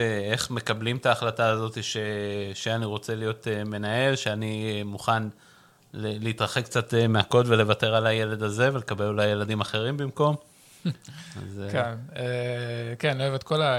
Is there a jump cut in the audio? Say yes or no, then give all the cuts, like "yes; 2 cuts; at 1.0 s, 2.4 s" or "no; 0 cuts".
no; 0 cuts